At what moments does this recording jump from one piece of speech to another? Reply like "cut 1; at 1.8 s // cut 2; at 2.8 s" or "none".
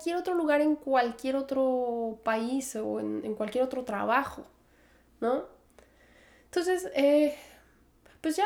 none